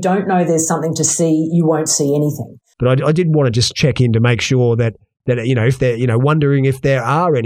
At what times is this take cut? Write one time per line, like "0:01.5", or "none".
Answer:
0:02.7